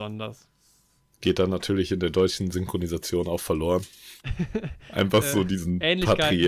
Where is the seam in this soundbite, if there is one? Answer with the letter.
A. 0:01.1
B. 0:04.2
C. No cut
B